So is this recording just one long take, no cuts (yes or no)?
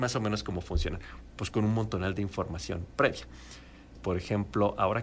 no